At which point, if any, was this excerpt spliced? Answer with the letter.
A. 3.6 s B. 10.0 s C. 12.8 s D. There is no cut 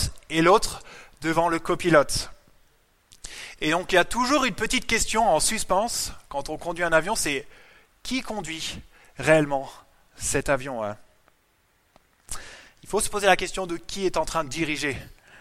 D